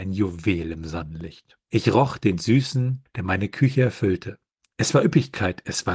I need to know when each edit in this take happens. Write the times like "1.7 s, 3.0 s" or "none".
1.6 s, 3.1 s